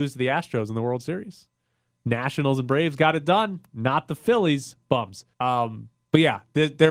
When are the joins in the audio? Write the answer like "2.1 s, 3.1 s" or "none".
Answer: 5.3 s